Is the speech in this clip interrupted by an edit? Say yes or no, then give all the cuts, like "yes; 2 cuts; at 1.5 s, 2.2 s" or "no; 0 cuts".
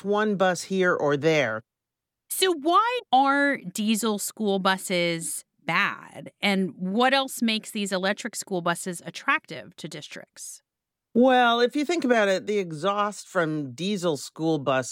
no; 0 cuts